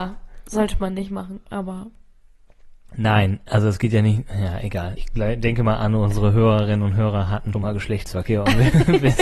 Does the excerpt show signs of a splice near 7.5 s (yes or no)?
yes